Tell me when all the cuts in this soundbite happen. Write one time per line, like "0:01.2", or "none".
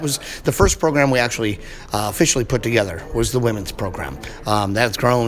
none

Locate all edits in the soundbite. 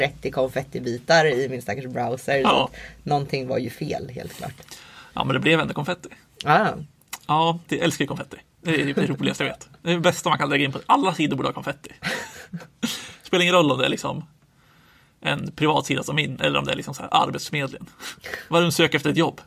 0:07.7

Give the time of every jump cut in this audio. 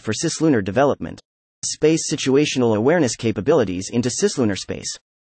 0:01.6

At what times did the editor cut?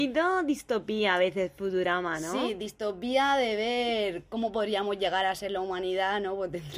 none

